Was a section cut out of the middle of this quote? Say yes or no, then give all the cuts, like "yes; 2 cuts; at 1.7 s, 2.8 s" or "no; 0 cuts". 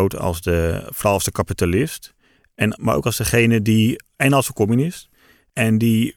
no; 0 cuts